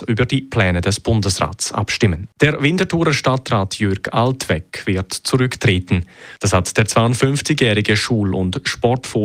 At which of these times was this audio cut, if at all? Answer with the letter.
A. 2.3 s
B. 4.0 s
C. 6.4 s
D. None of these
A